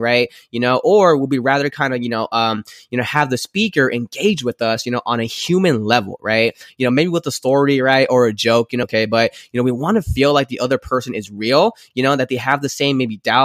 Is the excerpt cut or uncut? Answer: cut